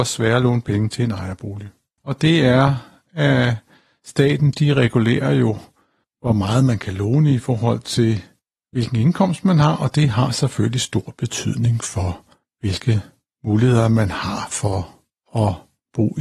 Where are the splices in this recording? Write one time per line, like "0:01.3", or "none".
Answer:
0:02.0